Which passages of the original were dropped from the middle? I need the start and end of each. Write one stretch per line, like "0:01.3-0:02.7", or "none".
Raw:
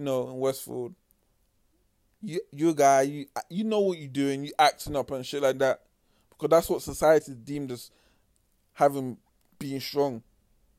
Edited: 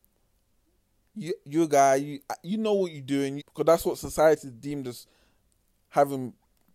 0:04.5-0:06.2